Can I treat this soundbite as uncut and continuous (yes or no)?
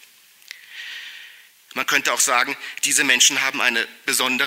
no